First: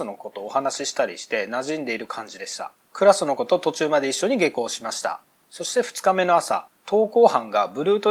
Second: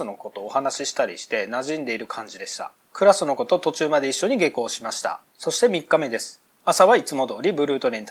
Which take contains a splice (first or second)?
second